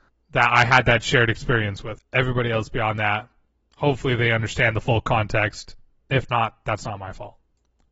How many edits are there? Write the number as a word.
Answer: one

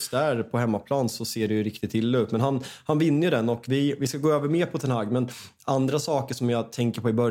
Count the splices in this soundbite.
zero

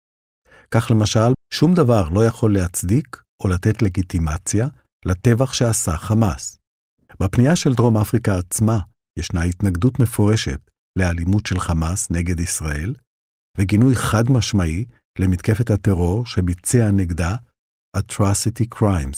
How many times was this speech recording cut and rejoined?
three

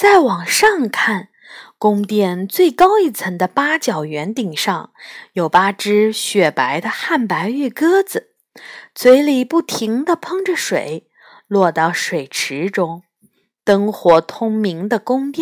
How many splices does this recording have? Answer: zero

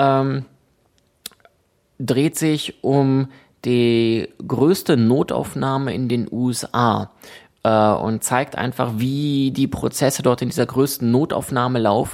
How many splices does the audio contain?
zero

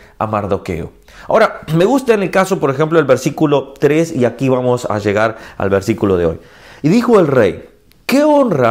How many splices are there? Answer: zero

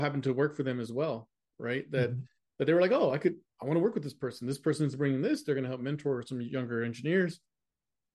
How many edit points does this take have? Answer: zero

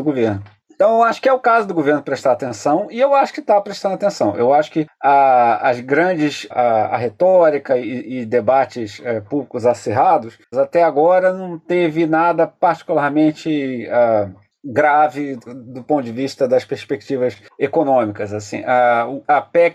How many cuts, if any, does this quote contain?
three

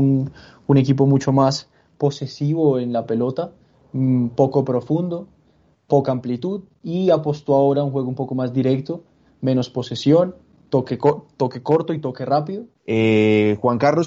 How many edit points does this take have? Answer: one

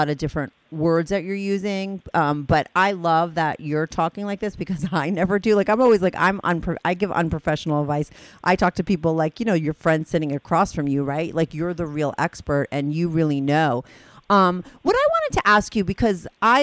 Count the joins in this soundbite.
zero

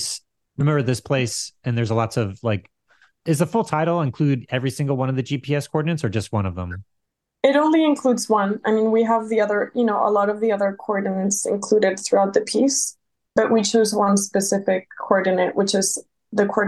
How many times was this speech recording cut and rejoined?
zero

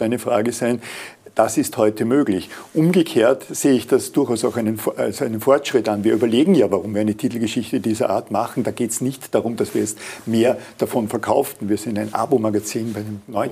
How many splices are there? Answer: zero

